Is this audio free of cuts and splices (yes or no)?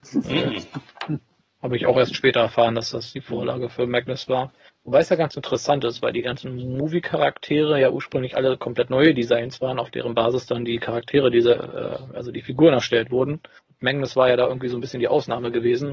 yes